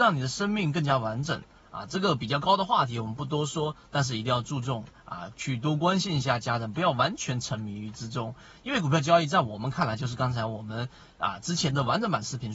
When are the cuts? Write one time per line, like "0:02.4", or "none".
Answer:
none